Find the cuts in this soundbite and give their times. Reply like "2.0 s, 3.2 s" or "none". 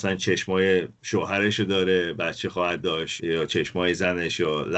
3.2 s